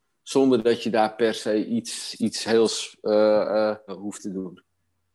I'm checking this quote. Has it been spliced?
yes; 1 cut; at 3.9 s

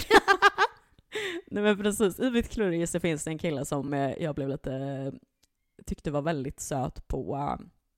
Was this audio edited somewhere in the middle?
no; 0 cuts

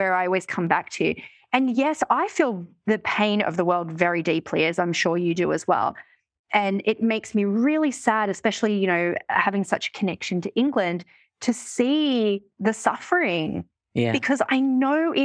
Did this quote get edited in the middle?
no; 0 cuts

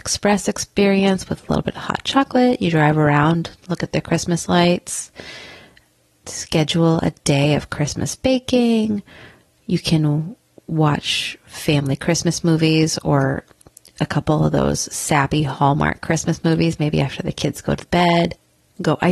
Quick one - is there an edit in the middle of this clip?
no; 0 cuts

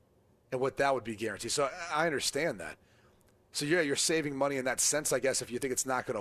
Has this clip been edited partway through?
no; 0 cuts

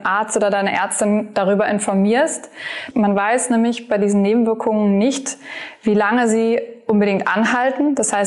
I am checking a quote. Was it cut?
yes; 1 cut; at 2.9 s

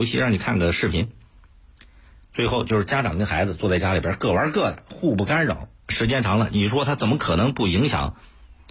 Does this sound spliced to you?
yes; 1 cut; at 5.8 s

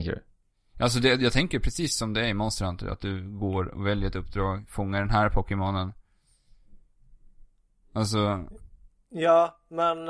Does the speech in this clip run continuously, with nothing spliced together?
yes; 0 cuts

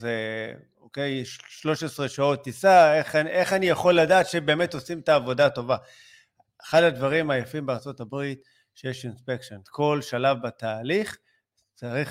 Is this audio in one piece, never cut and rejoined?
no; 1 cut; at 9.6 s

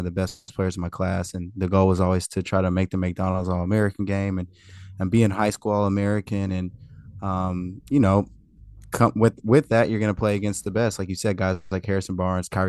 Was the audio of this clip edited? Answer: no; 0 cuts

